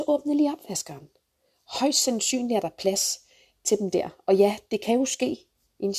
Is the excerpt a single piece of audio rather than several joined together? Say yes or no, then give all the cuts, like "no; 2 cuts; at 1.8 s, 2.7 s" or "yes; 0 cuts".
yes; 0 cuts